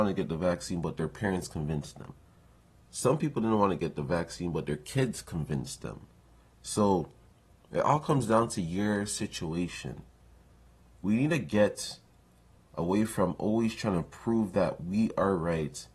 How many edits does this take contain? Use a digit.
0